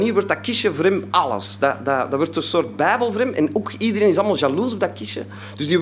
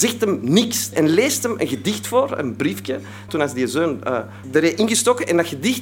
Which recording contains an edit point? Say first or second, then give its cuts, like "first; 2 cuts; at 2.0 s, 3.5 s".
second; 3 cuts; at 0.9 s, 3.3 s, 4.4 s